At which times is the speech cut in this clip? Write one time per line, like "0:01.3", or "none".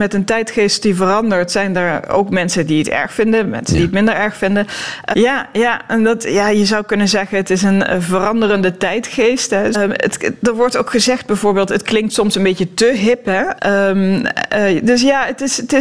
0:05.1
0:09.7
0:13.6